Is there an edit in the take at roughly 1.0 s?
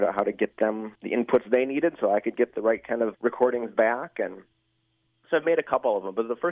yes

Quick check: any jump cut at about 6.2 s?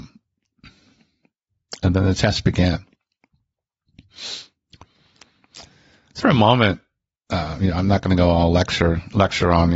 yes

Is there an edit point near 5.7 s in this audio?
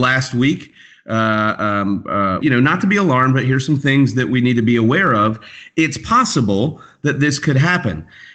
no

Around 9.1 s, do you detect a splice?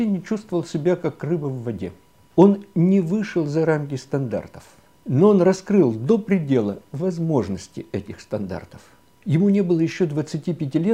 yes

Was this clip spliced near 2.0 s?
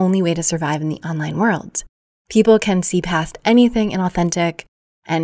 no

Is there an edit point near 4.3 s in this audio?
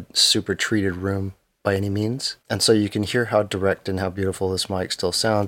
no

